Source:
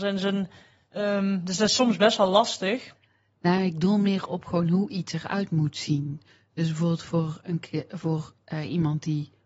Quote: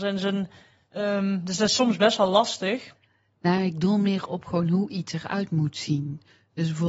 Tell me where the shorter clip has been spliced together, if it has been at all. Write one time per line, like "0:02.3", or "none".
none

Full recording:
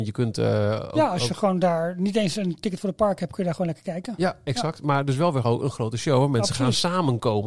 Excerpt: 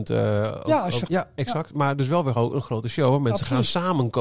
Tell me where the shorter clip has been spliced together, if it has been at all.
0:01.1

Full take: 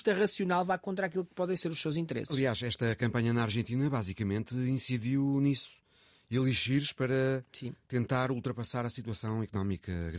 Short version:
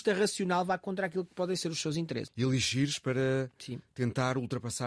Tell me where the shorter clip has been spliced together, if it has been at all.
0:02.3

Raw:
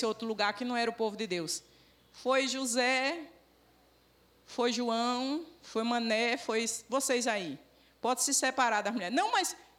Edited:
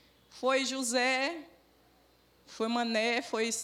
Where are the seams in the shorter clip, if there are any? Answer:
0:02.4

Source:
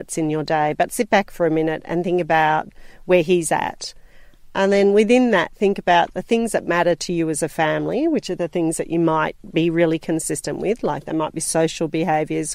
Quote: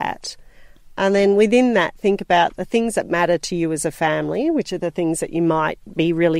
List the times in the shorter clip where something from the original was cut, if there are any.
none

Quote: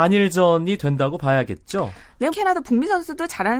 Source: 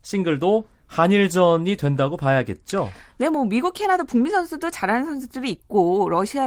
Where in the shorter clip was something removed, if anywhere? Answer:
0:02.3

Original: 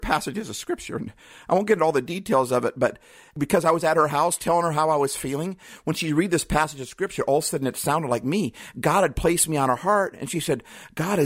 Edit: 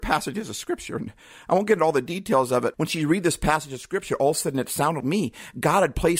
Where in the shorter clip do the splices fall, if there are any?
0:02.7
0:05.0

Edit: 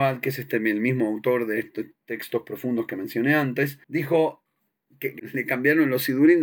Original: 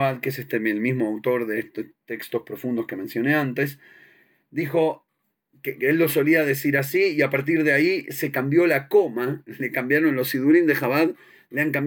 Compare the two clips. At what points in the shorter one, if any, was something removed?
0:03.8
0:05.2

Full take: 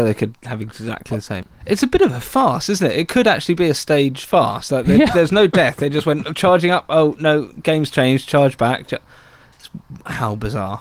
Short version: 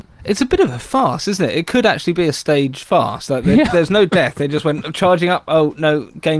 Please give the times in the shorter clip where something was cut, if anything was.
none

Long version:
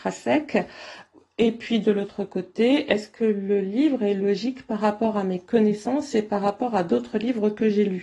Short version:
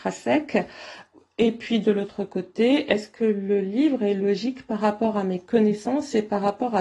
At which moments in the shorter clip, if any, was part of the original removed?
none

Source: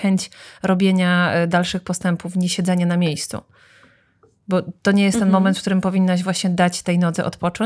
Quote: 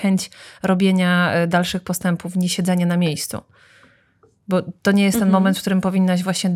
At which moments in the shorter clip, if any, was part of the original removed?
none

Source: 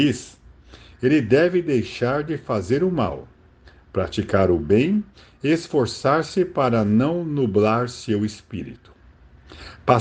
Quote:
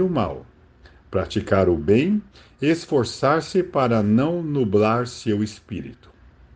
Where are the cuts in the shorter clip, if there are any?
none

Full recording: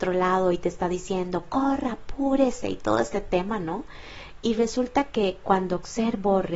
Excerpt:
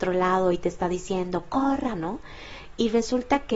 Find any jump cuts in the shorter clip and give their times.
0:01.9

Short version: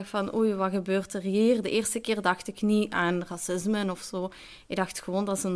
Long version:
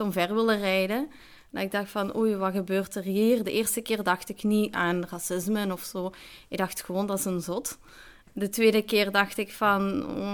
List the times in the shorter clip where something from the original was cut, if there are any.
none

